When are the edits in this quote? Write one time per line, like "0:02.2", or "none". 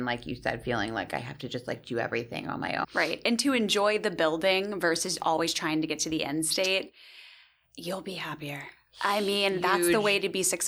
0:02.8